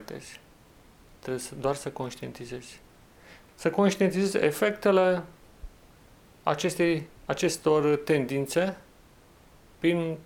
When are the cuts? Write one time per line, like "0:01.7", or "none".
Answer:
0:03.5
0:07.2